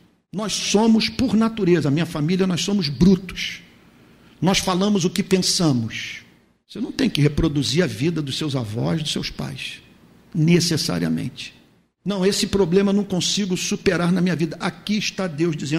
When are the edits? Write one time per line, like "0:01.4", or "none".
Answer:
none